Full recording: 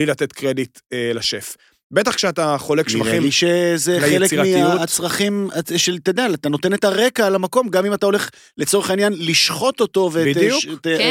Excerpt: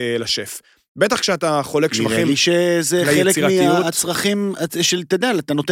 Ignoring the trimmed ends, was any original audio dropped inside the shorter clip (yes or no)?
no